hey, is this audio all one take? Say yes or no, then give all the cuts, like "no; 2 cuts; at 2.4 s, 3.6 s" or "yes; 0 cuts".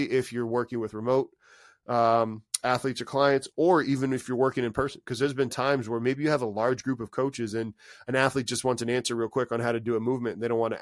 yes; 0 cuts